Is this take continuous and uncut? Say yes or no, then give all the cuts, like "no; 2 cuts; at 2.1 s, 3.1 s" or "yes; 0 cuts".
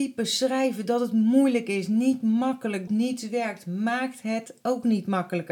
no; 1 cut; at 2.9 s